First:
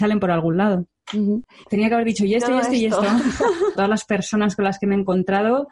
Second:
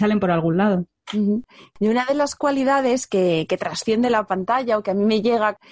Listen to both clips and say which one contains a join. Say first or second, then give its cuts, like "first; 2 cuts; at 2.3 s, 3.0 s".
first; 2 cuts; at 1.6 s, 3.7 s